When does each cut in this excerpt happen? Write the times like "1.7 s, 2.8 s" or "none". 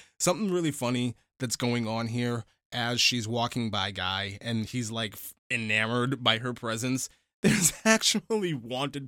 5.4 s